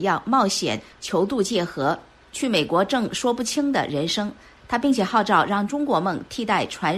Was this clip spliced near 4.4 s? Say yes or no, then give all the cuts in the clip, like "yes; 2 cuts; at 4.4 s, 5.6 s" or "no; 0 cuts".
no; 0 cuts